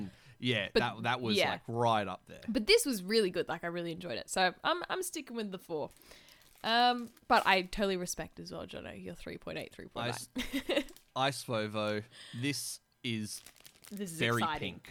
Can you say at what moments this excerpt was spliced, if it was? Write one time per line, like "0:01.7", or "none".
0:07.2